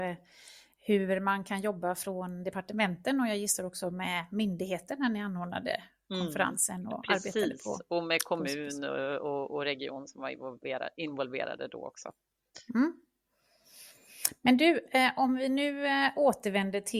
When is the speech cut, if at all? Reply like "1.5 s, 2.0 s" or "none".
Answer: none